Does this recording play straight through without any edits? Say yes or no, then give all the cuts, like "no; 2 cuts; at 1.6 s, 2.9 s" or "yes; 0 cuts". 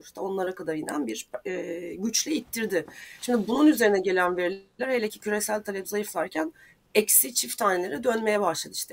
yes; 0 cuts